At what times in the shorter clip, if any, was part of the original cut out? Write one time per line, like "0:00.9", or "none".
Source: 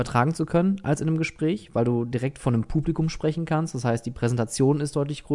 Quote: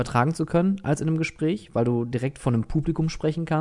none